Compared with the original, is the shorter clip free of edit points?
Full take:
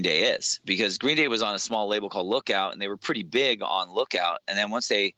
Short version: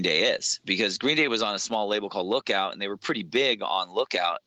yes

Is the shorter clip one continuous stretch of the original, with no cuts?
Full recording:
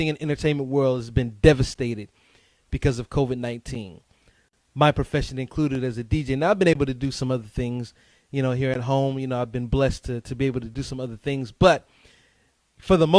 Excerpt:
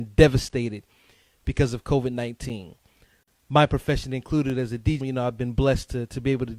no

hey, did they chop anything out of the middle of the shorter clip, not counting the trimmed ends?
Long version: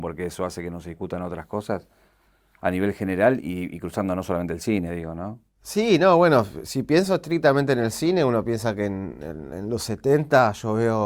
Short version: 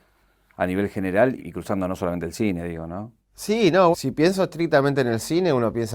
yes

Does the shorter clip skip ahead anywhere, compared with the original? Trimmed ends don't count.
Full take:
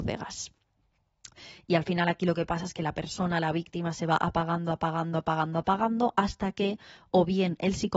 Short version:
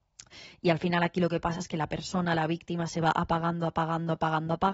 no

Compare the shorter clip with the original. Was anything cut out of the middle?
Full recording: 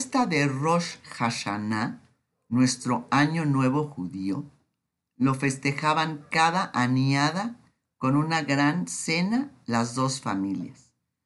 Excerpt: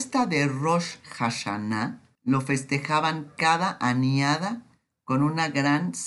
yes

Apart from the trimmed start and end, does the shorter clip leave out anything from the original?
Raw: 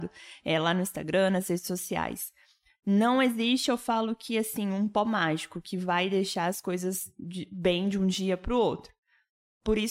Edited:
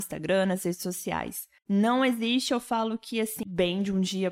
yes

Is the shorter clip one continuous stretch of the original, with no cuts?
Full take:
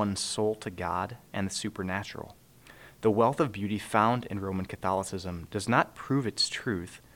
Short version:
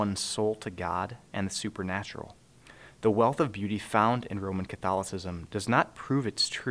yes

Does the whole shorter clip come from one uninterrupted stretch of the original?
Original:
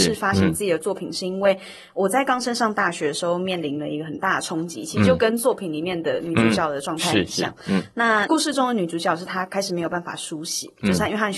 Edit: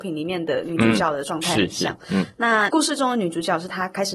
yes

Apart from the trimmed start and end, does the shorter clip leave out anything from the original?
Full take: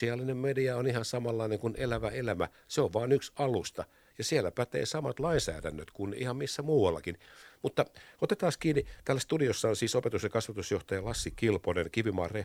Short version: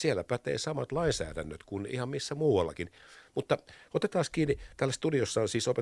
no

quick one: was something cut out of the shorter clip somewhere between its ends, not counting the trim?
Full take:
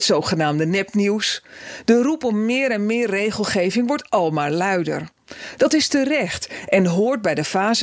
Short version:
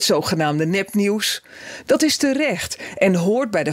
yes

